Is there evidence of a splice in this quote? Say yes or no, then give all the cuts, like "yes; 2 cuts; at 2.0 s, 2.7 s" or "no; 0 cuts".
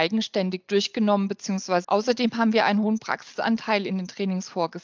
yes; 1 cut; at 1.8 s